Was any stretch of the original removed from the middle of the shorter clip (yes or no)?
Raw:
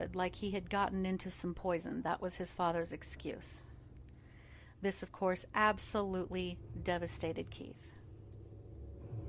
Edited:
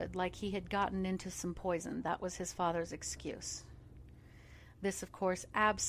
no